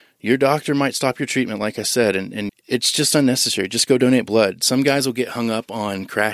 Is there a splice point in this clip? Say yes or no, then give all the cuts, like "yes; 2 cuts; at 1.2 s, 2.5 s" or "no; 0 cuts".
yes; 1 cut; at 2.5 s